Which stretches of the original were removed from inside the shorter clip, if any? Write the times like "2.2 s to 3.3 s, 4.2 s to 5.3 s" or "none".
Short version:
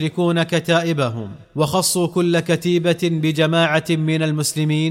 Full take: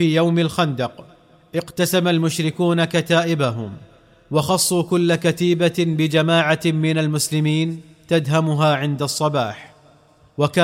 3.9 s to 4.2 s